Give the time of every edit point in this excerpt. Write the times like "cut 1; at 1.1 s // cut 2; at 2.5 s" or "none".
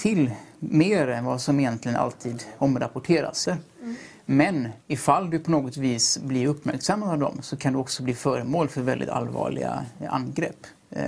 cut 1; at 3.5 s // cut 2; at 4.8 s